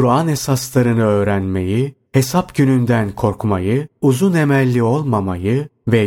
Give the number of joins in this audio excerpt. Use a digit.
1